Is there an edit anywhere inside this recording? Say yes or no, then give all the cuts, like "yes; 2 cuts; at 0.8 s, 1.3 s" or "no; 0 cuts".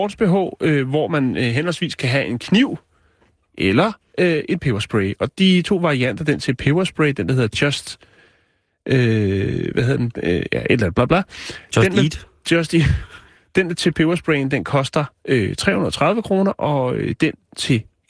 no; 0 cuts